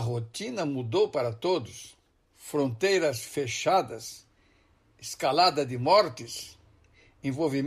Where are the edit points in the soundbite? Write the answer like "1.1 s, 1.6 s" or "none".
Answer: 2.3 s